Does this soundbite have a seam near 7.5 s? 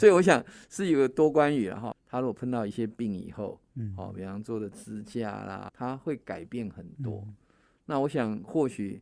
no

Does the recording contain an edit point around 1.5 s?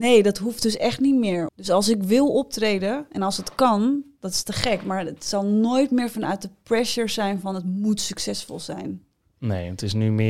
yes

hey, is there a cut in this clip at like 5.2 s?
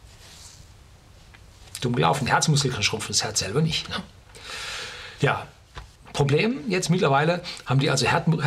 yes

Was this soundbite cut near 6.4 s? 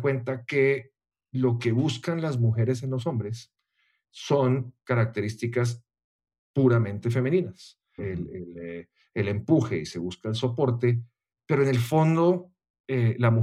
no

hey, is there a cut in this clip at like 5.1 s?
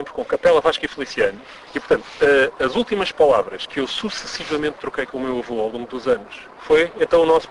no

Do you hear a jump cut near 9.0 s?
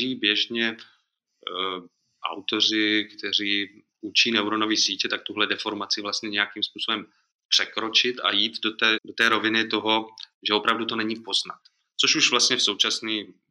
yes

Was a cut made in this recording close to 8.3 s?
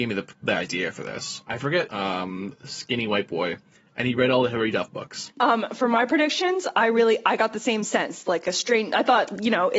no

